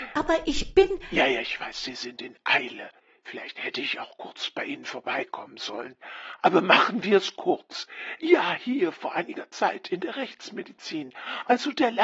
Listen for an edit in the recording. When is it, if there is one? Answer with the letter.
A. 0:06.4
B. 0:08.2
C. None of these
B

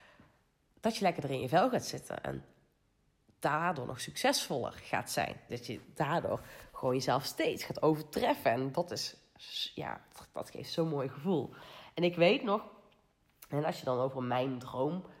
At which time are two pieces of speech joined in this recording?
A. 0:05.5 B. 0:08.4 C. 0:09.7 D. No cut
A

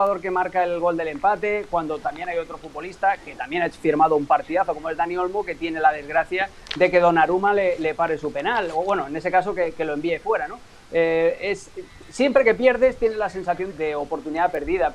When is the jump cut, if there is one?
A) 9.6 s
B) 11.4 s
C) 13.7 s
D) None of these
C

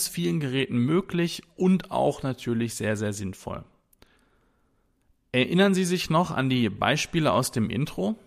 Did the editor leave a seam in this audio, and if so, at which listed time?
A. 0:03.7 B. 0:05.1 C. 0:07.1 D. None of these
D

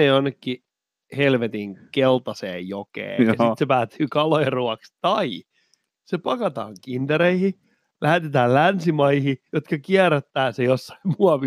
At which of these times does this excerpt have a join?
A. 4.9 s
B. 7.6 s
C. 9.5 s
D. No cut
C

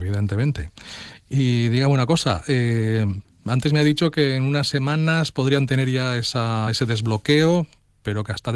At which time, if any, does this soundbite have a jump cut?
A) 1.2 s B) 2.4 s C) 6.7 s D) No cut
D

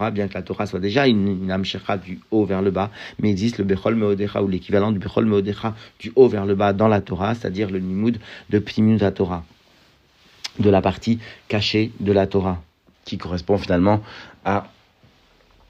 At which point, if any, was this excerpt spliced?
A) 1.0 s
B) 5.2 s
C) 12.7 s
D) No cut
D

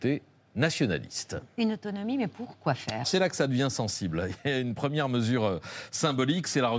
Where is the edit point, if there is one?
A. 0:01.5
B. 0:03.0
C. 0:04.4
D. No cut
B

